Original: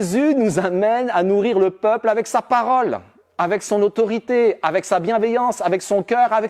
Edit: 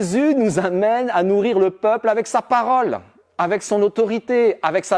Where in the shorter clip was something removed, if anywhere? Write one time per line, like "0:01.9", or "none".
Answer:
none